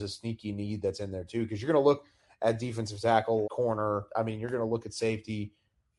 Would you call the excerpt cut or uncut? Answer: cut